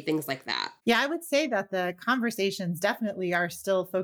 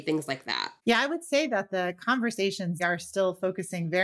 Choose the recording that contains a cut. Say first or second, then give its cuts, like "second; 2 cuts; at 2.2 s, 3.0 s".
second; 1 cut; at 2.8 s